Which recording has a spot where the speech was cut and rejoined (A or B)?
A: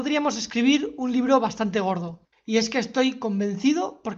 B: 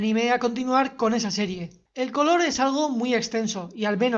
A